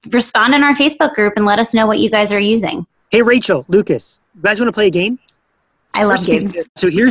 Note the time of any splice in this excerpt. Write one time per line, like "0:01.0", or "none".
0:04.3